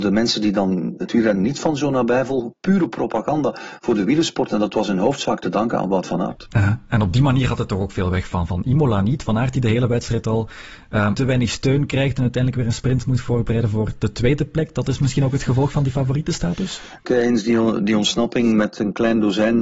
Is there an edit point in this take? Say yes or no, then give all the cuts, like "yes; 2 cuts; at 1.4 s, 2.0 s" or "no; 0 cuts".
yes; 2 cuts; at 11.1 s, 17.0 s